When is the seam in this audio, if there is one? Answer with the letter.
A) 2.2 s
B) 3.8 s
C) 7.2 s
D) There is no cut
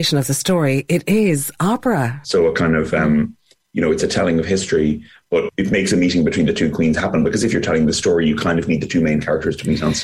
A